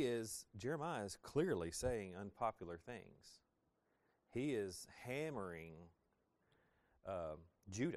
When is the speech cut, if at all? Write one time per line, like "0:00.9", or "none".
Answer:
none